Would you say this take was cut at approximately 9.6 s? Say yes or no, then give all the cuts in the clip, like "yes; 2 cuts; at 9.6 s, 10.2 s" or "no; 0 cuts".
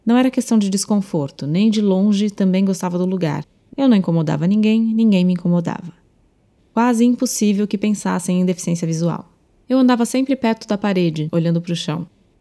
yes; 3 cuts; at 6.6 s, 9.6 s, 11.3 s